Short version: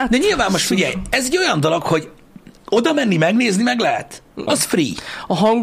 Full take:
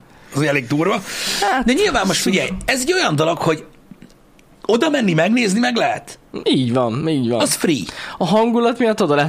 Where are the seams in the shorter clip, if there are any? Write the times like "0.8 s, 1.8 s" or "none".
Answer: 2.6 s, 4.5 s